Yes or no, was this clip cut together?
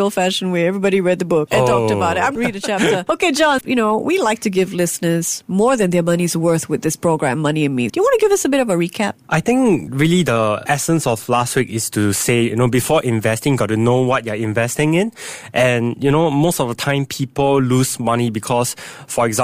yes